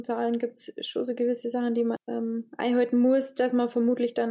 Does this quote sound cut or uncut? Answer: cut